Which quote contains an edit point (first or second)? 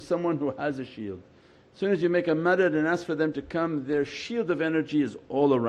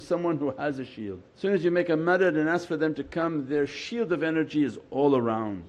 second